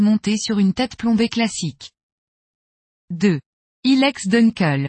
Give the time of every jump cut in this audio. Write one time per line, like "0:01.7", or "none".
none

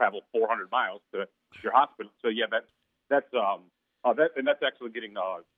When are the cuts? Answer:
0:02.2

